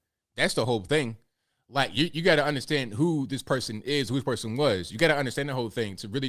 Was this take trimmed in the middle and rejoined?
no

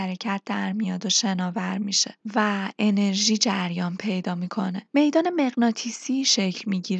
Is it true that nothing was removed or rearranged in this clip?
yes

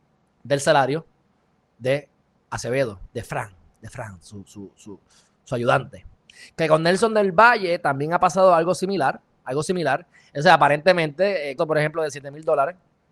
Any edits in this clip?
yes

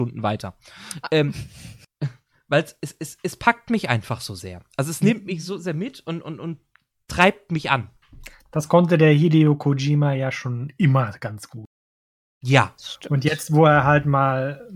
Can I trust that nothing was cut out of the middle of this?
yes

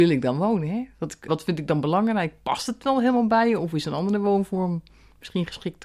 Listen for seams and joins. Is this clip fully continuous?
no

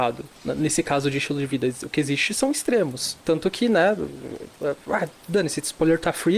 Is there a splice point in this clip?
no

